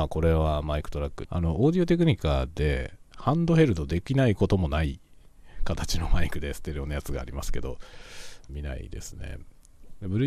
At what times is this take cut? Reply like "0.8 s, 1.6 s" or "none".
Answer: 1.2 s, 8.5 s